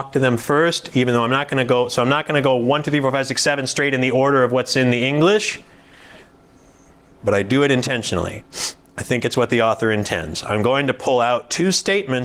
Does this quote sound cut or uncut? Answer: uncut